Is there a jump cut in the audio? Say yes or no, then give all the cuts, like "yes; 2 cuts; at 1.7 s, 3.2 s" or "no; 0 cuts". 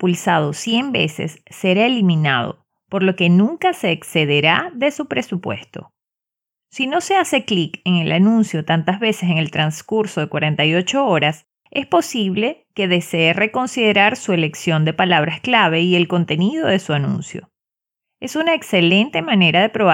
no; 0 cuts